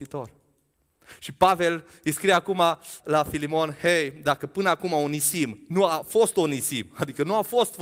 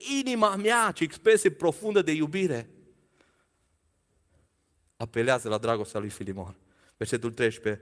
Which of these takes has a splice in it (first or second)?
first